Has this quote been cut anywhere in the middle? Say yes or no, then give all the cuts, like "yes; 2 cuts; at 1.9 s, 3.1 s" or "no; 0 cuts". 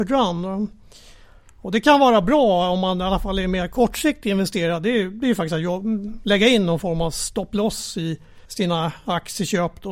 yes; 1 cut; at 8.4 s